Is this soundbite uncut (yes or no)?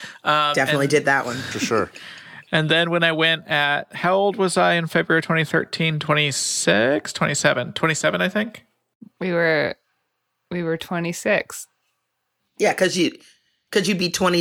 yes